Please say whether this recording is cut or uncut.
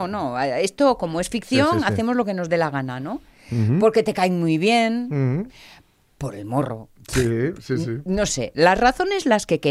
uncut